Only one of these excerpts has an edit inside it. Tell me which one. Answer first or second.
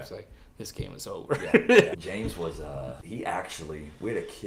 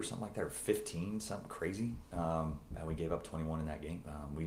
first